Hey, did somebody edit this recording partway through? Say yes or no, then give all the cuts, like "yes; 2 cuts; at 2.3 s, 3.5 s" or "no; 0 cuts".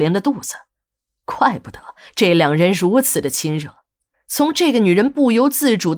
yes; 1 cut; at 4.1 s